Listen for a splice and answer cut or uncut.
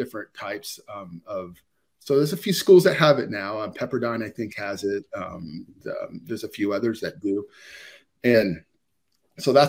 uncut